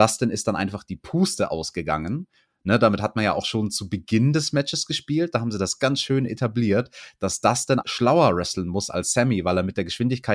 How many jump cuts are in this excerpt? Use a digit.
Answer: 2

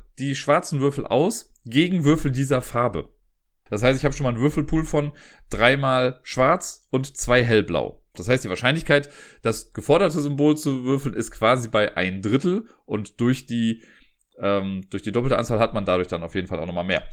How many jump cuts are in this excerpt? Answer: 2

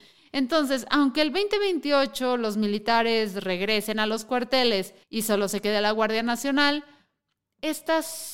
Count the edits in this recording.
1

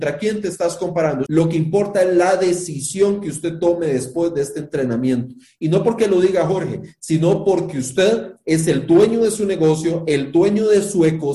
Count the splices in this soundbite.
1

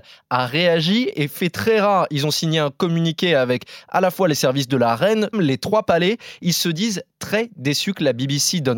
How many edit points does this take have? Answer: 1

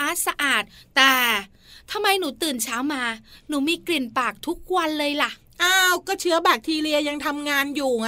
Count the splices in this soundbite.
0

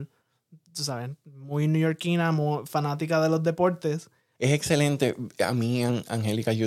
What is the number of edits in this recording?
1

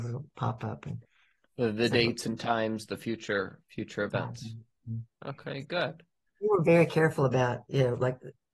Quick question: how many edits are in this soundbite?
0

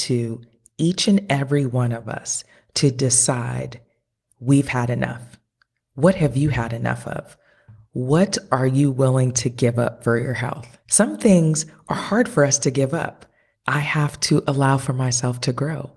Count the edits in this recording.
2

